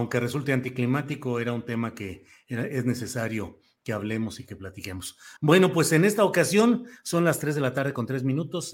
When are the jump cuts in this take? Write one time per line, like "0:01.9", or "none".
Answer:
none